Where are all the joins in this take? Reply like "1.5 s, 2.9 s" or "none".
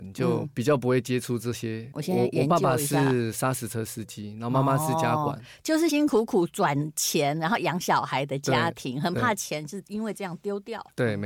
1.9 s, 5.9 s